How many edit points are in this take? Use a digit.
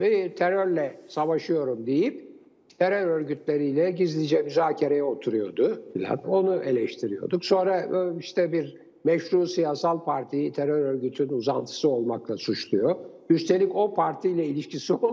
1